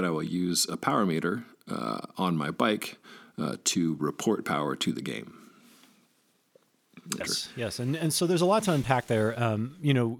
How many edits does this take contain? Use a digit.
1